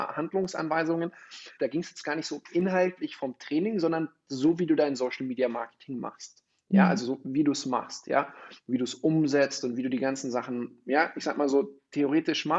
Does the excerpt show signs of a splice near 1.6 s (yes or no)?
yes